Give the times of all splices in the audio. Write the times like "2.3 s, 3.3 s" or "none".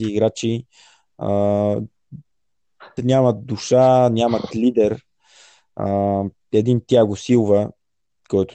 3.0 s